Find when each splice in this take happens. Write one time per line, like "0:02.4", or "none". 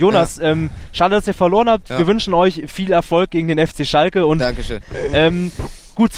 0:04.8